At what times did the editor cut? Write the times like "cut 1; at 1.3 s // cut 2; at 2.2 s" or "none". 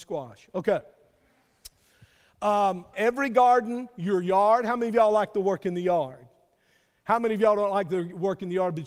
cut 1; at 2.9 s